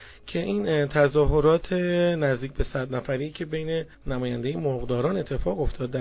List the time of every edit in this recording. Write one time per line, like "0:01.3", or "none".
0:03.9